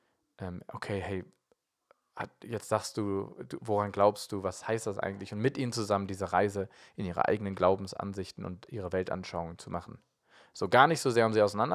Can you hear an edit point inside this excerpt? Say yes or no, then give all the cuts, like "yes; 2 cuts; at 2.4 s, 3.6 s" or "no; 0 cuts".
no; 0 cuts